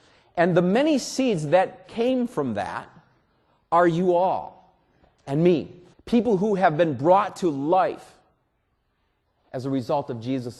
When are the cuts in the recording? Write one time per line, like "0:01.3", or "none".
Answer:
0:05.9